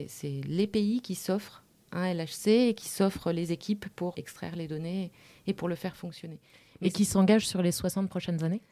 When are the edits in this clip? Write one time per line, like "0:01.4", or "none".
0:04.1